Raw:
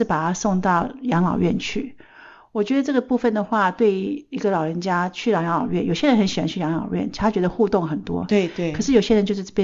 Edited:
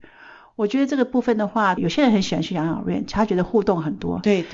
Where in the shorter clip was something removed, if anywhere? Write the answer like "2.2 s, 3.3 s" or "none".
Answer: 1.8 s